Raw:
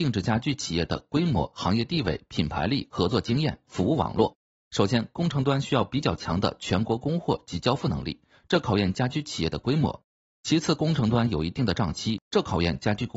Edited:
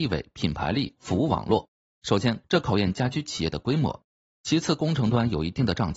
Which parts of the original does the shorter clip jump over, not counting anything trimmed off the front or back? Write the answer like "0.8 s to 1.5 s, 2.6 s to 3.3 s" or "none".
2.9 s to 3.6 s, 5.1 s to 8.4 s